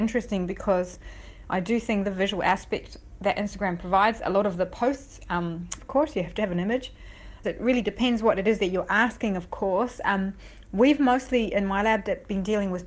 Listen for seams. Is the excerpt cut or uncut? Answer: cut